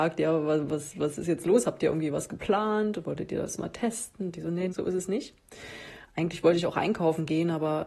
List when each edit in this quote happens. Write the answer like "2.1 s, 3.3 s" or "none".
4.7 s, 6.0 s